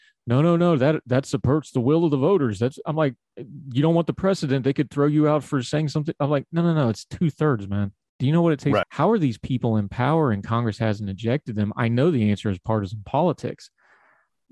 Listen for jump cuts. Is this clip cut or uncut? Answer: cut